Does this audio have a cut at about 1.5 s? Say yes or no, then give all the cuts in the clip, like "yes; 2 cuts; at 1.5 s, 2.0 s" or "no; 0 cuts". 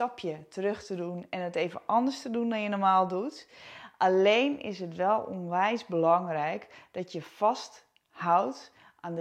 no; 0 cuts